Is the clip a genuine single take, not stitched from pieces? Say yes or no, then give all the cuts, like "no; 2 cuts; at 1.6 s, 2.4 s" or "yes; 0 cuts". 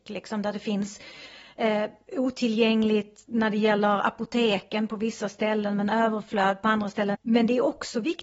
no; 1 cut; at 7.1 s